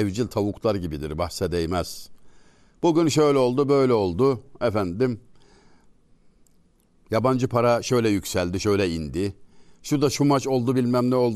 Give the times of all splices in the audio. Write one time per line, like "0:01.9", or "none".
none